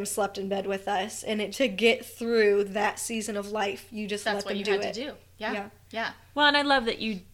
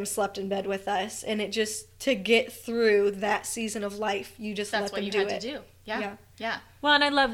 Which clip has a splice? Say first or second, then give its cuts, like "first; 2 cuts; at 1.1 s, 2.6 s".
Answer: first; 1 cut; at 1.5 s